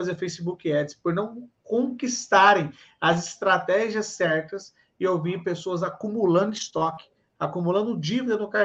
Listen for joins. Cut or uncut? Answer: uncut